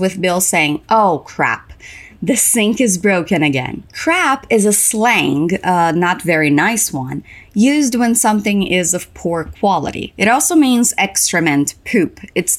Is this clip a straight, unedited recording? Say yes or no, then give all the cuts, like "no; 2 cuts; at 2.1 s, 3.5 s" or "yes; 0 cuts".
yes; 0 cuts